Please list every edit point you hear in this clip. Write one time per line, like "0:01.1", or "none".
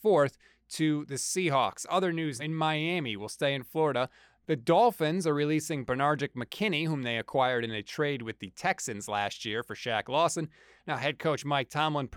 0:02.4
0:10.8